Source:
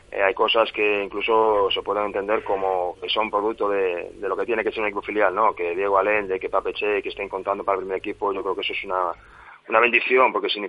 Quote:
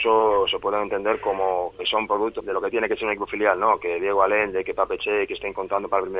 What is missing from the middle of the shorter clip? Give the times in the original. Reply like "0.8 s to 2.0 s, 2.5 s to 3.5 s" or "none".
3.6 s to 4.1 s